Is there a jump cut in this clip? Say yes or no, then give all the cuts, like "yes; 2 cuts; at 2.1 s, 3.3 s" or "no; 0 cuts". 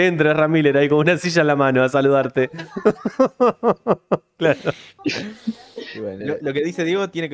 yes; 2 cuts; at 5.0 s, 6.2 s